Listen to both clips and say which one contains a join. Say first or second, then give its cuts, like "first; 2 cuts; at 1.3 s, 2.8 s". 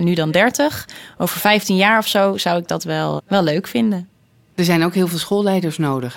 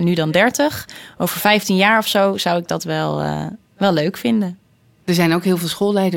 first; 1 cut; at 3.2 s